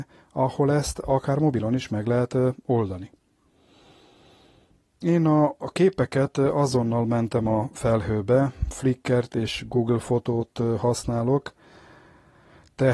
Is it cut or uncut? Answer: uncut